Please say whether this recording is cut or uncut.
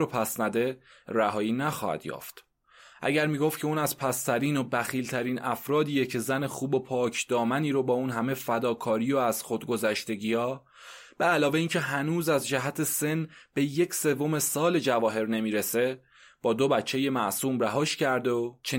uncut